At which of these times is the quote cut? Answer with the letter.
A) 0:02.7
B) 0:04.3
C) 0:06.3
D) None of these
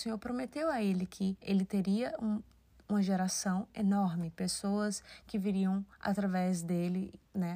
D